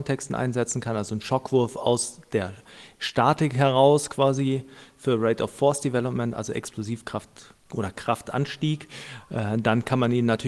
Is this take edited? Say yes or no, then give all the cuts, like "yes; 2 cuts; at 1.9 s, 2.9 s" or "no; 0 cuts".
no; 0 cuts